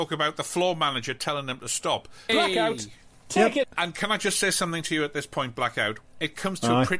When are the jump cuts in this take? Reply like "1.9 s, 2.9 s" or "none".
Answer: 2.3 s, 3.6 s